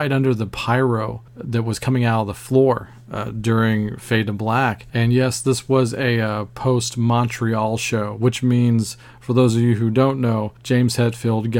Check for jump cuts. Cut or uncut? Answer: cut